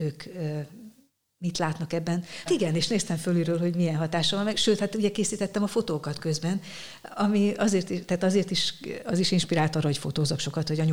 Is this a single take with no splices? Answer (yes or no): no